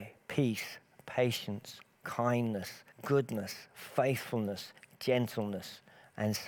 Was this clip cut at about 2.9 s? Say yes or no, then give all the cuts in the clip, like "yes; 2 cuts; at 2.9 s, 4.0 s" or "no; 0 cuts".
yes; 1 cut; at 2.9 s